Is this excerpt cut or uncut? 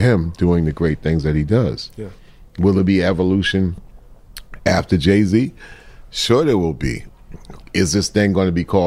uncut